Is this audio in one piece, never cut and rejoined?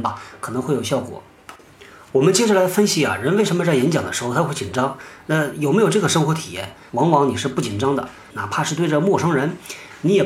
no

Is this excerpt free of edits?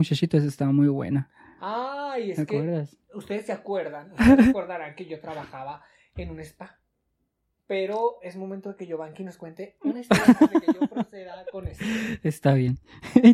yes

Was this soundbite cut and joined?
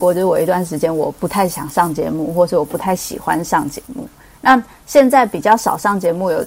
no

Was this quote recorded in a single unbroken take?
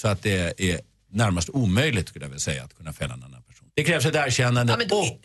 no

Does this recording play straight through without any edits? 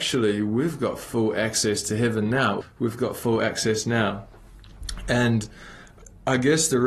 no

